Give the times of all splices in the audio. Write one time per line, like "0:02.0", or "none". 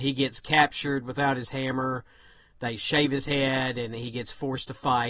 none